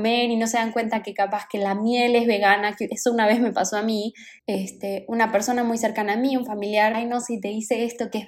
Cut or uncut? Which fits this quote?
cut